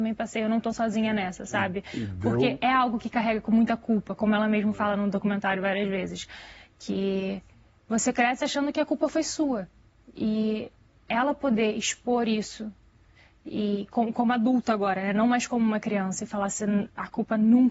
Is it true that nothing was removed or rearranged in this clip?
yes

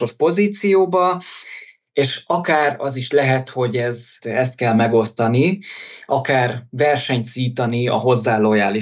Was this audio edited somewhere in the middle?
yes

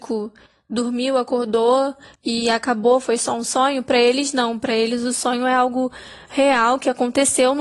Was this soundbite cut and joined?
no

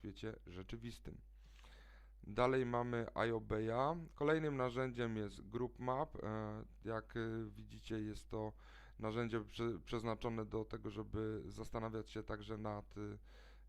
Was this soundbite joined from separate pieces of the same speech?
yes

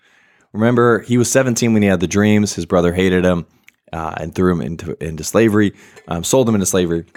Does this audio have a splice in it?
no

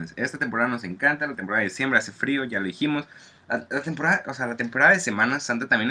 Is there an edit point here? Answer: no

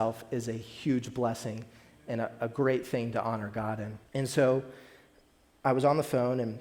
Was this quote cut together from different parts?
yes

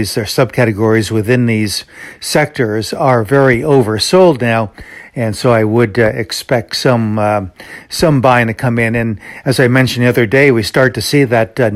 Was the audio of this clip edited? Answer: no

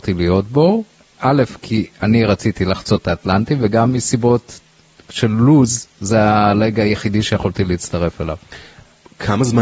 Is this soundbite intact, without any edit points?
yes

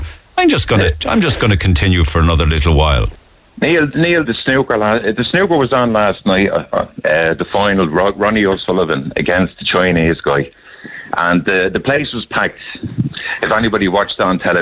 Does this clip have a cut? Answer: yes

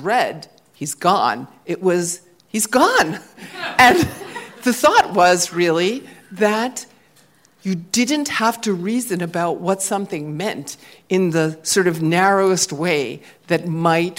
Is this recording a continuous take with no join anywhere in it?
yes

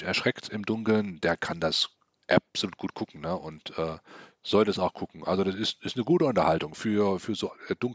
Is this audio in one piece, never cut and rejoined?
yes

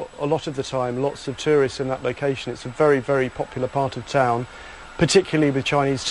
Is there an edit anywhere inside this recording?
no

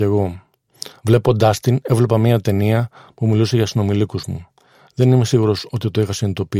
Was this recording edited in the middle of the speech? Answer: no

